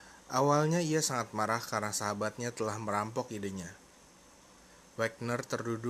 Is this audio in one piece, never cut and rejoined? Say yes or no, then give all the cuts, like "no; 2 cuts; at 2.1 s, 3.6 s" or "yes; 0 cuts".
yes; 0 cuts